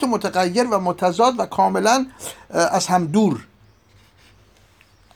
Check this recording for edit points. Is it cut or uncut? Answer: uncut